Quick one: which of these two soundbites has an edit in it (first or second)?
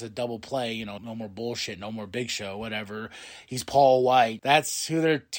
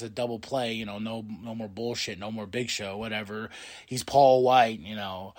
first